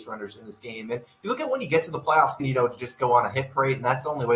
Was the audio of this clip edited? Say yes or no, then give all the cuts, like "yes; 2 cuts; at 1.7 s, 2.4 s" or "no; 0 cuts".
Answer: yes; 1 cut; at 2.4 s